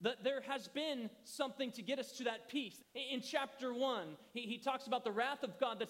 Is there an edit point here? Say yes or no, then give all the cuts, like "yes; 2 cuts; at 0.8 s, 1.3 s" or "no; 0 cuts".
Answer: yes; 1 cut; at 2.8 s